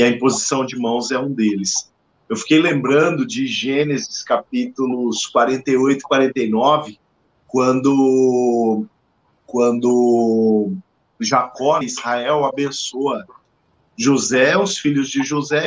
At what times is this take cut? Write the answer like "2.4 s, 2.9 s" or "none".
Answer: 11.8 s

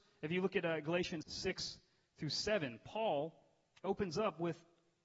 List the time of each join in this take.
1.2 s

